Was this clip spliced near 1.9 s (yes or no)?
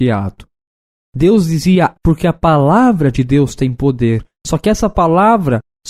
yes